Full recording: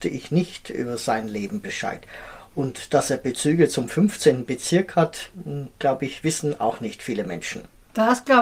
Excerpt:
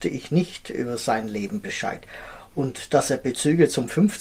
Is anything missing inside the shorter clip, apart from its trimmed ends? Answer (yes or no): no